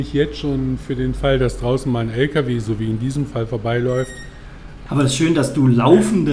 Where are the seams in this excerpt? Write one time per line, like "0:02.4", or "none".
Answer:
0:04.9